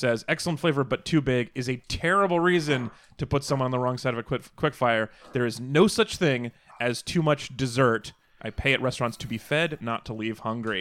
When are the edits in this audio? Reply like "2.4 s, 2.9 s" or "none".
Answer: 8.4 s